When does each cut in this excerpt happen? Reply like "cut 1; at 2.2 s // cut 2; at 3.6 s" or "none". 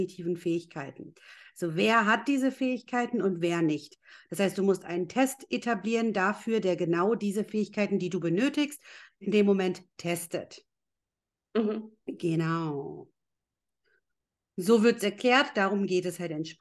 none